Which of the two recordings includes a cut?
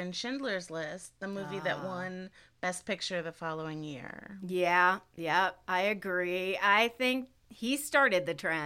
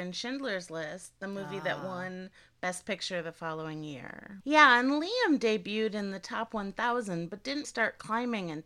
second; 2 cuts; at 4.4 s, 7.6 s

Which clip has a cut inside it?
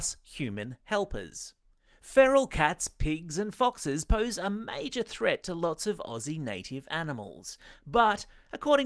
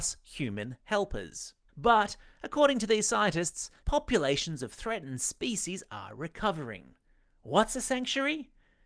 second; 2 cuts; at 1.7 s, 3.8 s

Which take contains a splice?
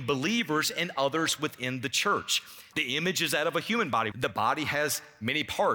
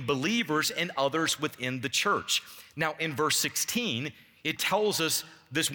first; 2 cuts; at 2.7 s, 4.1 s

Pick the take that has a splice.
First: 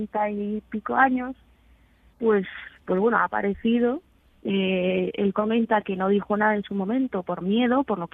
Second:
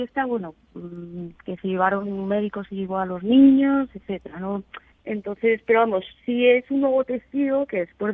second; 1 cut; at 4.9 s

